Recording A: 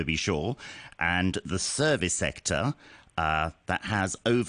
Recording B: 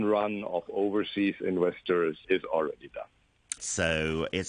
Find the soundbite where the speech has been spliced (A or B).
B